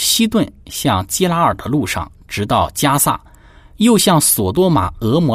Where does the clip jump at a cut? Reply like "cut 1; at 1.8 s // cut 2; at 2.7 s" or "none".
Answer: none